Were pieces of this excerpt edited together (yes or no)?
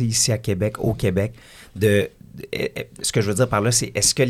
no